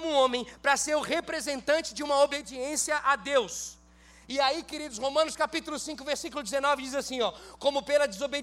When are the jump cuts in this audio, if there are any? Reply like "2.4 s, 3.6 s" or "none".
none

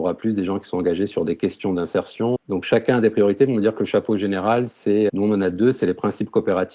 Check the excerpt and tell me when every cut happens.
2.4 s, 5.1 s

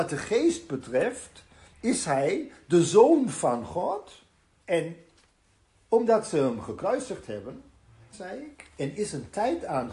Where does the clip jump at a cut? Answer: 4.6 s, 8.1 s

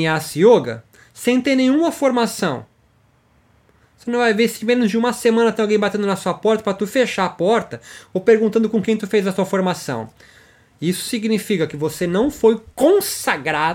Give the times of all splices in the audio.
none

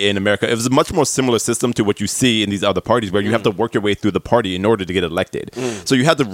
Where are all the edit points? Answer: none

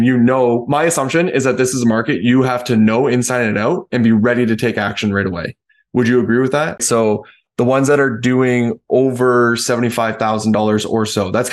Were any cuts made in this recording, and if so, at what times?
6.8 s

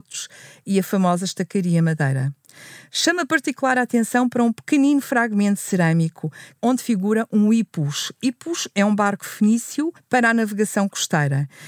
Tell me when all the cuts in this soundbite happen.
none

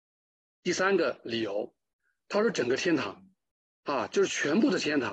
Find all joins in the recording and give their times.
none

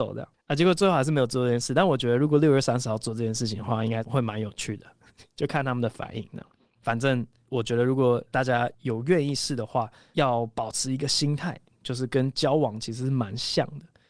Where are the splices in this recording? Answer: none

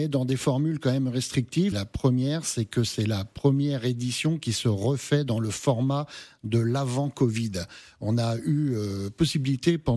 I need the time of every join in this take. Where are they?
1.7 s

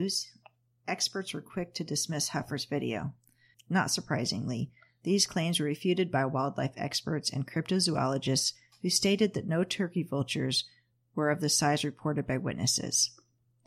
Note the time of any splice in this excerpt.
3.6 s

